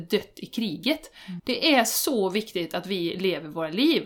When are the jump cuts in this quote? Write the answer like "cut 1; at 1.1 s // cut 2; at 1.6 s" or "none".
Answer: cut 1; at 1.4 s